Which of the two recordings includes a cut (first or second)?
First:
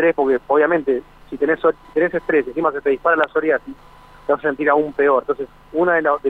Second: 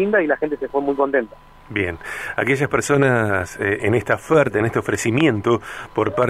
second